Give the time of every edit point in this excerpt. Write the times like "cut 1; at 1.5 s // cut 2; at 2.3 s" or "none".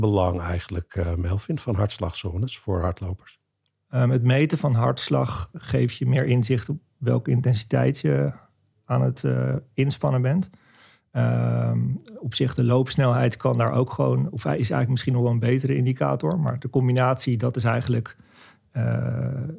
cut 1; at 5.5 s